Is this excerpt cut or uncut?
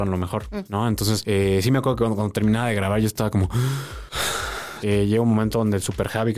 cut